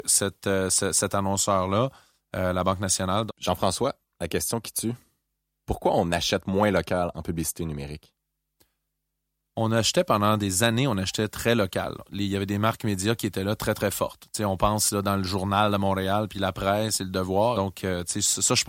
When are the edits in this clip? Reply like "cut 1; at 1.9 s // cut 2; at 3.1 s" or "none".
cut 1; at 3.3 s // cut 2; at 17.5 s